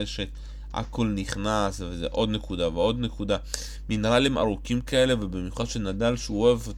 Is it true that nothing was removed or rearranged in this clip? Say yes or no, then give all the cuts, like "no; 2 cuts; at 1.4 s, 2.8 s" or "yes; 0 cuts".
yes; 0 cuts